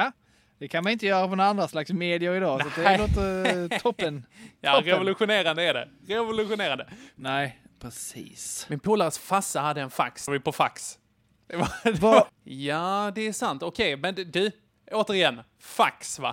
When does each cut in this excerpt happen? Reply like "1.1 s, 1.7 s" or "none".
7.2 s, 10.3 s, 12.3 s